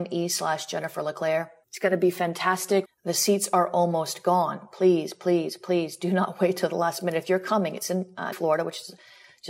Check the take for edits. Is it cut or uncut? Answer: cut